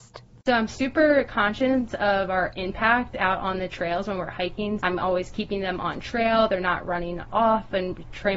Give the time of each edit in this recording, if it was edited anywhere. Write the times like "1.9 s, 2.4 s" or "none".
4.8 s